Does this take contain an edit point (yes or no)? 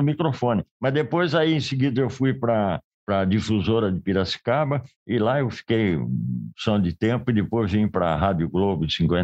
no